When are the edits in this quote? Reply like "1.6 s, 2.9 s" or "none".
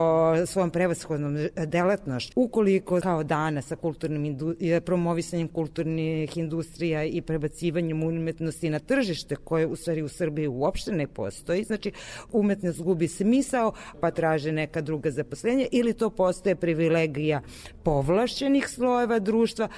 2.3 s, 13.9 s